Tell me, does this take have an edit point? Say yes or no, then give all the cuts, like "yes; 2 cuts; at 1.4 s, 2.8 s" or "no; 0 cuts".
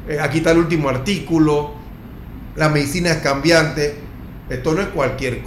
yes; 1 cut; at 4.4 s